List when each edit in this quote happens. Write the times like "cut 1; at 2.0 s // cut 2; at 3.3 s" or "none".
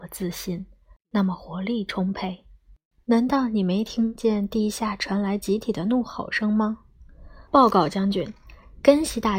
cut 1; at 3.0 s // cut 2; at 7.5 s